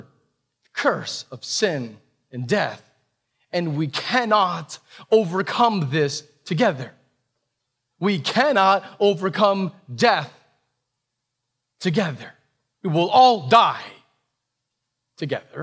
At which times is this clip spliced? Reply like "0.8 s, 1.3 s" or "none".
none